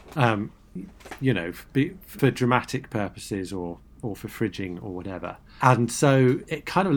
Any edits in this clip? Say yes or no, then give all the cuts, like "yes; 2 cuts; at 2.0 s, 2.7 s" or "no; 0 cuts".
no; 0 cuts